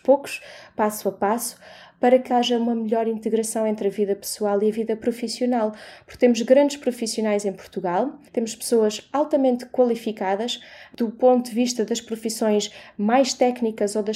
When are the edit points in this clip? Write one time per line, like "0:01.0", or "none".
0:02.3
0:08.3